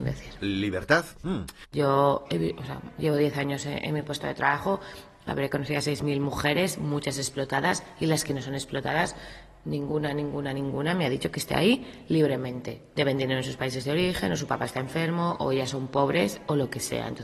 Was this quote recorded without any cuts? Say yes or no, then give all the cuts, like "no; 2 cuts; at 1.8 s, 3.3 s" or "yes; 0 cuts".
no; 1 cut; at 1.6 s